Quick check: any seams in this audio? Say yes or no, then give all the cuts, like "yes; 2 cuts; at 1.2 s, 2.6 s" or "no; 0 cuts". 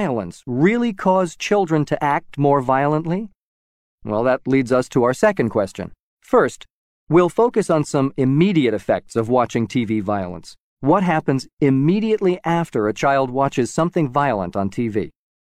yes; 1 cut; at 6.1 s